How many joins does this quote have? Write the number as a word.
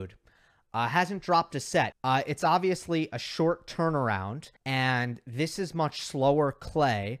two